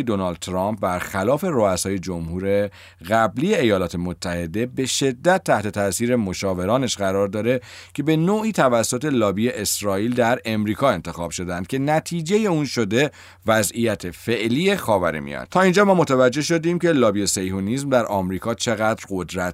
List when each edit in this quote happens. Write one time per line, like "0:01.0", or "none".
0:15.5